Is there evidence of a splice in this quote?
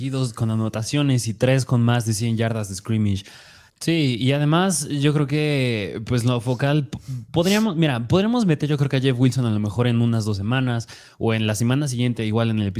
yes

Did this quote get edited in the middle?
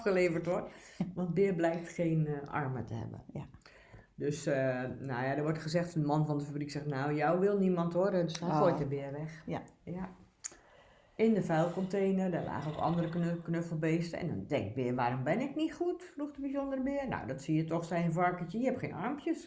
no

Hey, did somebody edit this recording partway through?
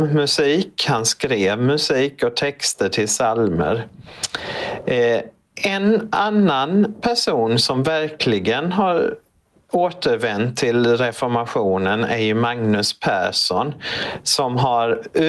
no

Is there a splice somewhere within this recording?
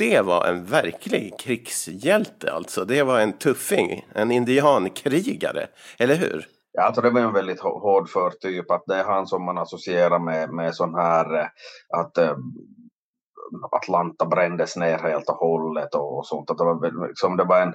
no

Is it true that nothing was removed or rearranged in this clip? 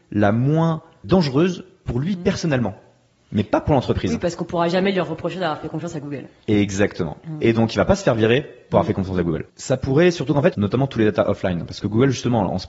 no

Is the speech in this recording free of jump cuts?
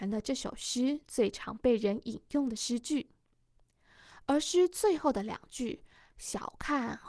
yes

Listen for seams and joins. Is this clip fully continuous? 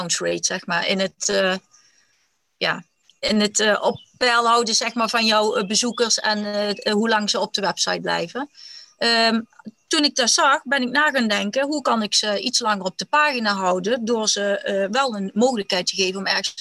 yes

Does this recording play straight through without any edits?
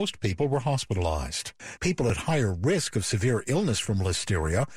no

